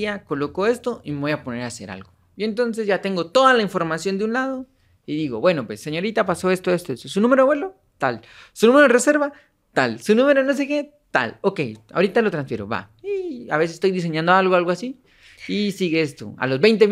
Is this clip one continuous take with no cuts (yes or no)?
yes